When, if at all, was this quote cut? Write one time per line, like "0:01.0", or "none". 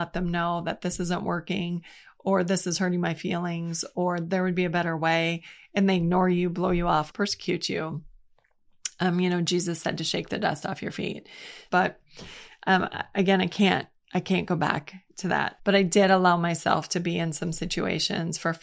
0:07.1
0:11.7
0:15.6